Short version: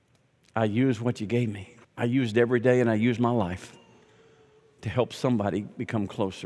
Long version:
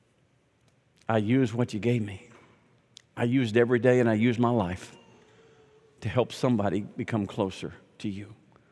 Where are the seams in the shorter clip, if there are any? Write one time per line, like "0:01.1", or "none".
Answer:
0:01.8